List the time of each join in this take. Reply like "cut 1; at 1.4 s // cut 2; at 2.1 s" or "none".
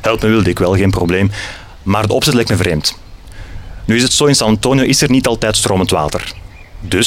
none